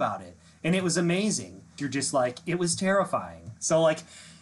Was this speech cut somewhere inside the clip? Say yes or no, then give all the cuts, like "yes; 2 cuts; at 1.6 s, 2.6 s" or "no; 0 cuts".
yes; 1 cut; at 1.8 s